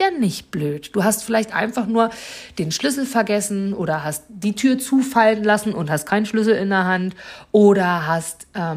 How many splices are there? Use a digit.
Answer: 0